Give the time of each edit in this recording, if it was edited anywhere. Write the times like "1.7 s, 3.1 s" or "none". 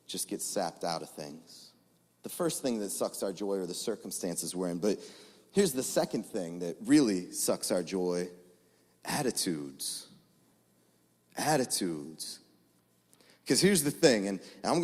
none